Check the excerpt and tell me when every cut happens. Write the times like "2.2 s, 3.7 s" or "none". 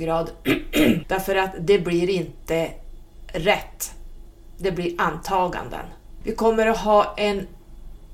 1.0 s, 6.2 s